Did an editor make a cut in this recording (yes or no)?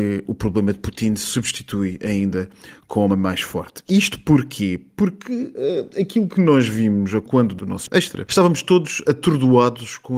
no